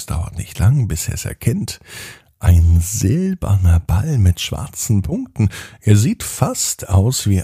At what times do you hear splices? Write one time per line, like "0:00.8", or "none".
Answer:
none

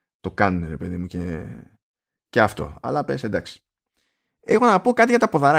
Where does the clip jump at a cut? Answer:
none

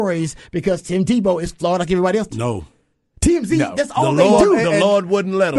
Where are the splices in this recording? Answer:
0:02.3

